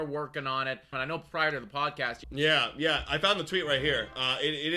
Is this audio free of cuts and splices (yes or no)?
no